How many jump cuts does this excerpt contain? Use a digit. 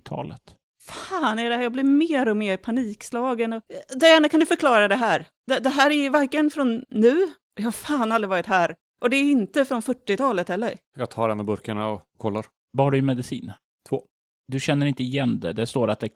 1